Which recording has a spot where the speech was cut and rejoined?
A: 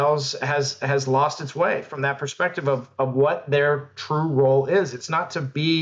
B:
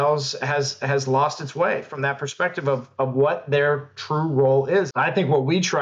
B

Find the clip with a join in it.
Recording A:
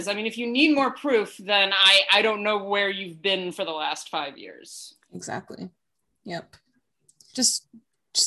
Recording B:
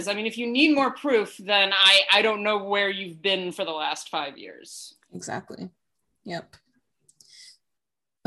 A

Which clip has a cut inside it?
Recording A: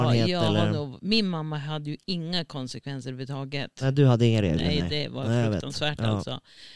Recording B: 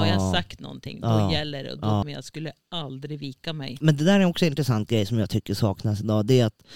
B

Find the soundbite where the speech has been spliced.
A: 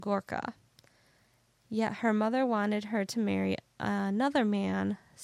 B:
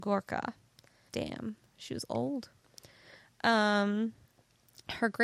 B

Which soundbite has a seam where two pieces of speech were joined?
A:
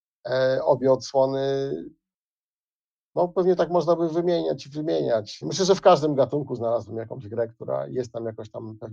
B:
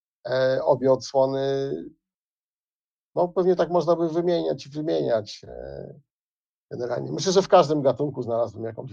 A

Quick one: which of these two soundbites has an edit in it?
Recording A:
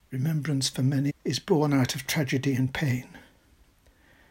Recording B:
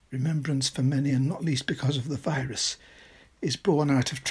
A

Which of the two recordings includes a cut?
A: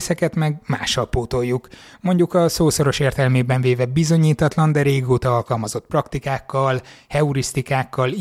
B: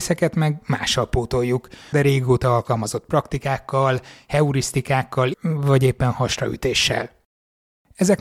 B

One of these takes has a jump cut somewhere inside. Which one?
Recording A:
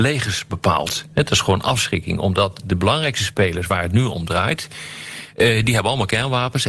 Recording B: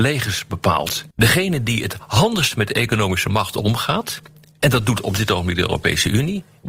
B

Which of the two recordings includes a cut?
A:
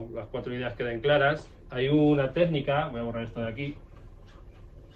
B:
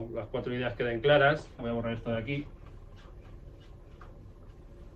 B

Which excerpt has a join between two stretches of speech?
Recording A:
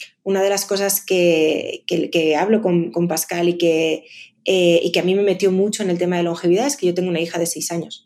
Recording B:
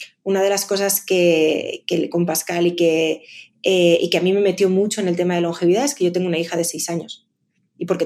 B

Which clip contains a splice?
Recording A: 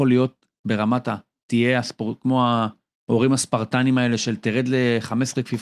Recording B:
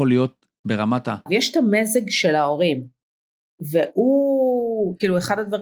B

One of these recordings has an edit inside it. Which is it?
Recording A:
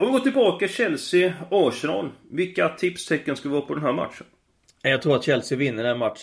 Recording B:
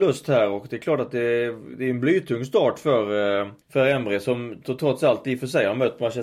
B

